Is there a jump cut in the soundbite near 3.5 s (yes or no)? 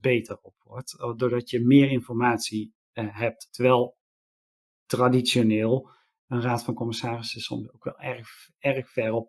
yes